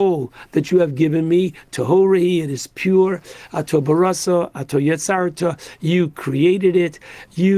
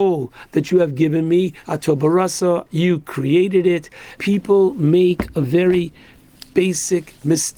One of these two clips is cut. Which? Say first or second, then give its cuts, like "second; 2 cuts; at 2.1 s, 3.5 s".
second; 3 cuts; at 1.6 s, 2.7 s, 4.2 s